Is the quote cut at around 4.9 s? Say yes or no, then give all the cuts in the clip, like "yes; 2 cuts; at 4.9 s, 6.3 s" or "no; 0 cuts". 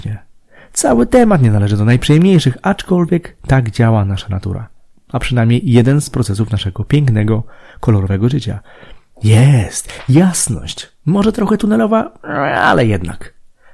no; 1 cut; at 9.1 s